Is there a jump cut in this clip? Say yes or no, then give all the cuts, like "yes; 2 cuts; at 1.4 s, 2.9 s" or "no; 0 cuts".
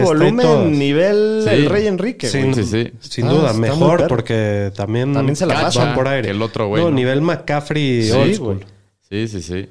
yes; 1 cut; at 2.5 s